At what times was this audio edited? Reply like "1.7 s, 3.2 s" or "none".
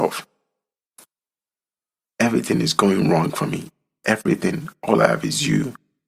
2.1 s